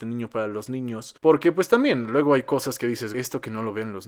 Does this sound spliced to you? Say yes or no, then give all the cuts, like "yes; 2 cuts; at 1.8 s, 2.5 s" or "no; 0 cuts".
yes; 2 cuts; at 1.2 s, 3.1 s